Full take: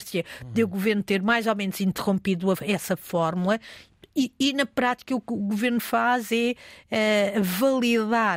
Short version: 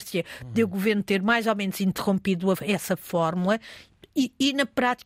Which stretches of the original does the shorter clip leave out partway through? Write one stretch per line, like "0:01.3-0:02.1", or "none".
none